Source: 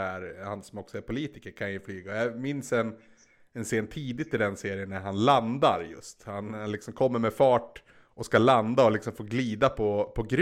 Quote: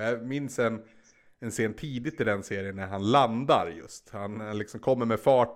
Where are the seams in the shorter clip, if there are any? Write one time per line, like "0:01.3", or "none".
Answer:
none